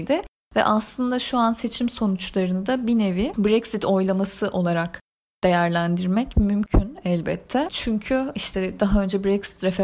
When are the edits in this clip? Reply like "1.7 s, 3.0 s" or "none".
none